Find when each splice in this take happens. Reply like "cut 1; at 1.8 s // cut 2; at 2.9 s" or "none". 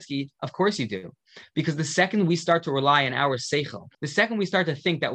cut 1; at 3.9 s